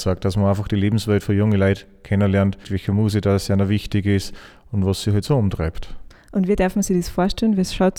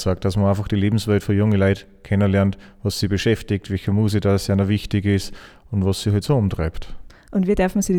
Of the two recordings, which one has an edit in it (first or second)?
first